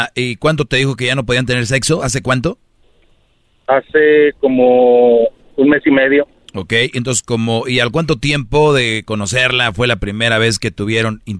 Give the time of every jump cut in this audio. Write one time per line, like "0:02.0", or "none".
none

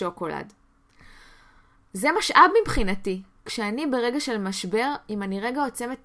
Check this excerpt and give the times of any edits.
none

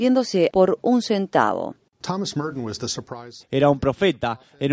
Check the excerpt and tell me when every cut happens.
0:03.4

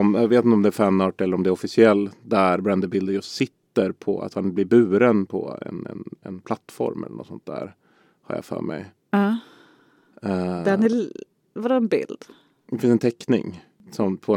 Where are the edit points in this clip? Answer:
none

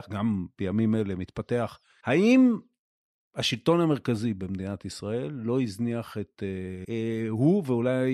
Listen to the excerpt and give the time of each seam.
0:02.0
0:06.8

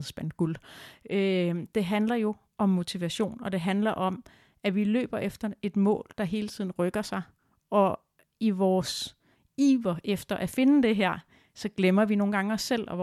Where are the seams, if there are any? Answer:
none

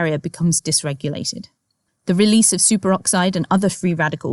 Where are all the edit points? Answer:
none

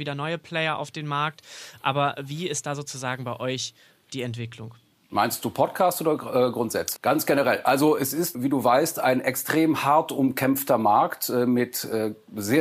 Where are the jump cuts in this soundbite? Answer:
0:07.0
0:08.3

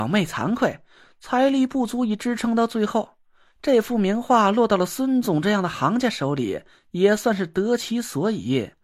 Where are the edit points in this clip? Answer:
none

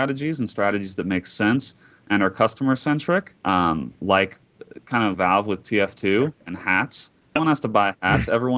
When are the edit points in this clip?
0:03.4
0:05.1
0:07.4

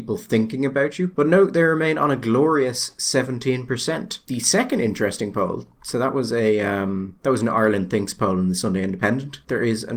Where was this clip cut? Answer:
none

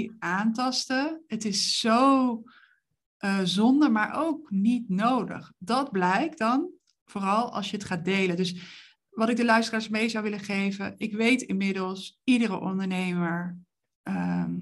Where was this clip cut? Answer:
none

